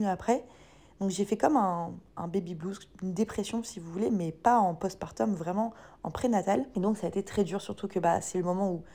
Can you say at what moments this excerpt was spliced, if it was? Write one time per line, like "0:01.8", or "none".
none